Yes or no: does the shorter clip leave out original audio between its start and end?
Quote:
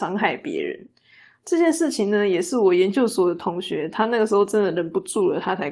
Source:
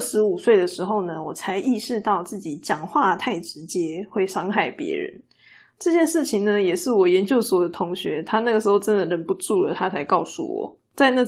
no